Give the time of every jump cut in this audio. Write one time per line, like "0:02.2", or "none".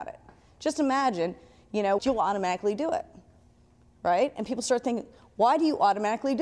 0:02.0